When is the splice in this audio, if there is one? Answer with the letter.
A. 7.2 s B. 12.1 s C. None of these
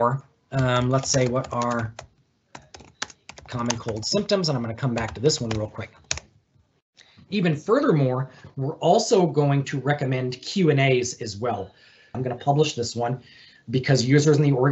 B